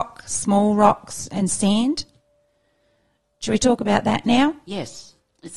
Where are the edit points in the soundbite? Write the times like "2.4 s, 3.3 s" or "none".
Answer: none